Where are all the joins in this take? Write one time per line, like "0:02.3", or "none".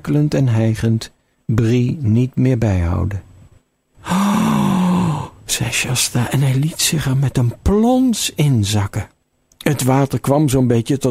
0:03.9